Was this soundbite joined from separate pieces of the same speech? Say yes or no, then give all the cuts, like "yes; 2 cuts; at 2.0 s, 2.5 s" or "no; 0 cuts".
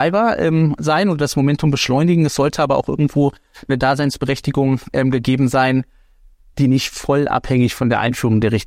no; 0 cuts